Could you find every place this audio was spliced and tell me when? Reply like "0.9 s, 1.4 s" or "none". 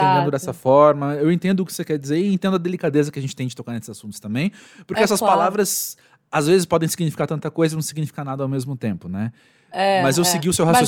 none